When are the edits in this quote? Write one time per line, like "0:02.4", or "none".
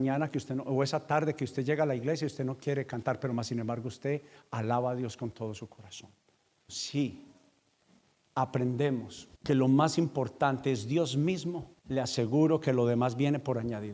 0:06.7
0:09.3
0:11.8